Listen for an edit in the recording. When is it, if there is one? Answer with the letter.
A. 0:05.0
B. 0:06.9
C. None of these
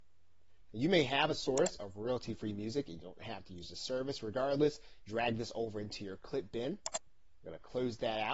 A